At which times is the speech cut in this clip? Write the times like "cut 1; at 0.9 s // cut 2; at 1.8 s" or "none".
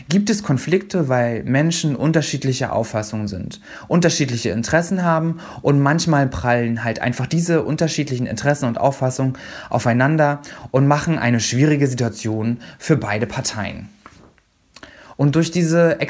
cut 1; at 15.1 s